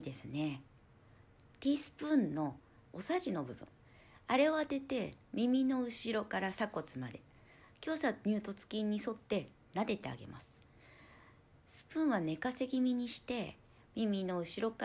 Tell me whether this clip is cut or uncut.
uncut